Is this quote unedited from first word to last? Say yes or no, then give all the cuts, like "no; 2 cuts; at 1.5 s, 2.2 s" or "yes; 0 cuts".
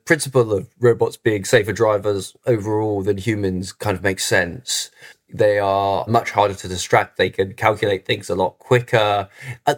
yes; 0 cuts